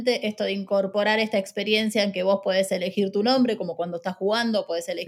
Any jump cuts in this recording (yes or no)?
no